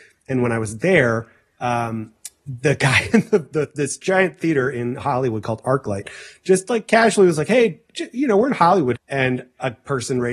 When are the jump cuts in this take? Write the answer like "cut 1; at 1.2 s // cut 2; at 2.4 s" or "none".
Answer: cut 1; at 9.0 s